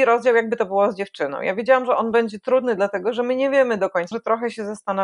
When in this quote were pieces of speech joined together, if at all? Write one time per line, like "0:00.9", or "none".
0:04.1